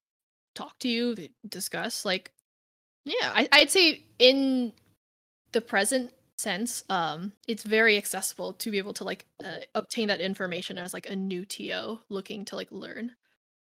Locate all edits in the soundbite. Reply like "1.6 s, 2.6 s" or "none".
7.4 s